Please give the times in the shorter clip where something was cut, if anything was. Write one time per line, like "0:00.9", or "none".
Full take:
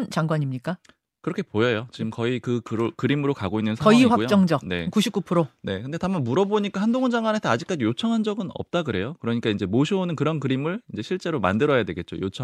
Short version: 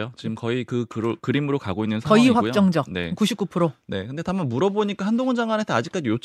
none